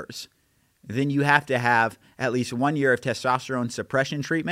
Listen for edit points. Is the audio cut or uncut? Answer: uncut